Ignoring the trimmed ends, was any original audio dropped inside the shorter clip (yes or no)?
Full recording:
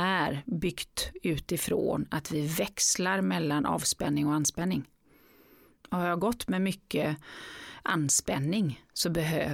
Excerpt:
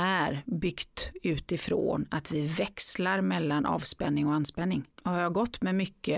yes